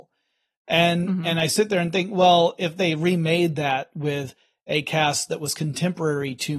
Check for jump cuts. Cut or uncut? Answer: uncut